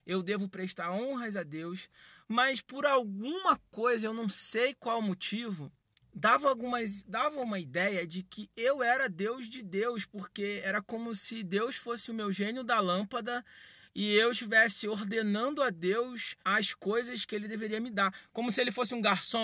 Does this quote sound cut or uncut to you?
cut